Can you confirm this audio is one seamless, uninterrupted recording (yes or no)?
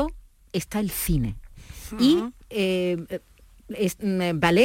yes